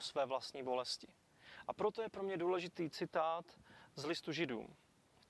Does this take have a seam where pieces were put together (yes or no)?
no